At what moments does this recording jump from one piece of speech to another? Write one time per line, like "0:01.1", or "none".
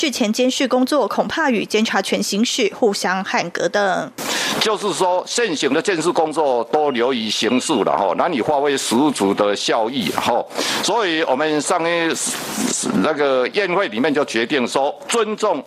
none